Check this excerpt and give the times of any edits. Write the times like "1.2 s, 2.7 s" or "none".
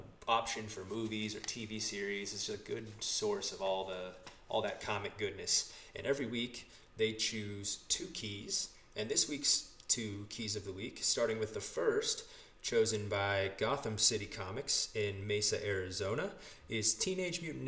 none